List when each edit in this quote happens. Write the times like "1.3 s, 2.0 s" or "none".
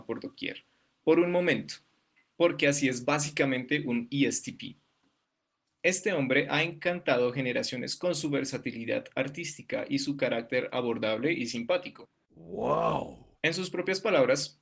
12.3 s, 13.4 s